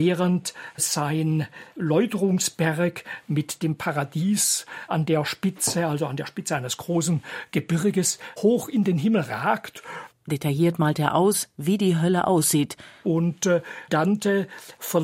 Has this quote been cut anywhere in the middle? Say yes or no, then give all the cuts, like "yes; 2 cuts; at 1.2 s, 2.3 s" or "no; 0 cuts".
yes; 2 cuts; at 10.1 s, 13.0 s